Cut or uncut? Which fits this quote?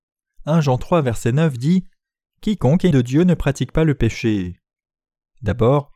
cut